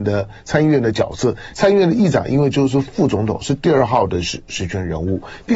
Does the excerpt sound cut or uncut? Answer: uncut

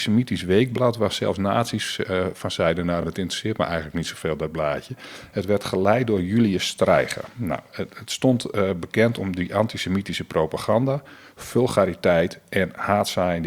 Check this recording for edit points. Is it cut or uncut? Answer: uncut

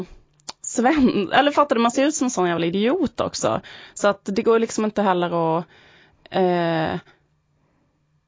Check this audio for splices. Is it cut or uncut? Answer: uncut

